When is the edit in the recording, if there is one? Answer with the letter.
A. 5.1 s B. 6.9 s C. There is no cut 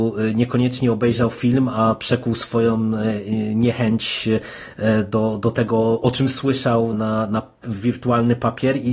B